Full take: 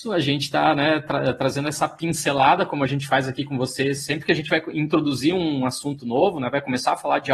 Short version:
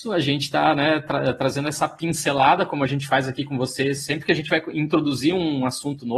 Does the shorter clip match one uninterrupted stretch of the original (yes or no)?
yes